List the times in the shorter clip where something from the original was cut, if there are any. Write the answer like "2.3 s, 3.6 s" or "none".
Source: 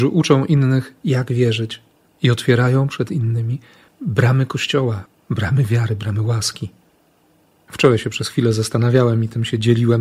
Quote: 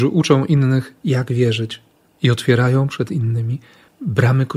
none